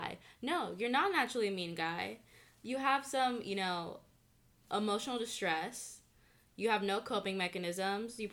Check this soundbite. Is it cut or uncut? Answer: uncut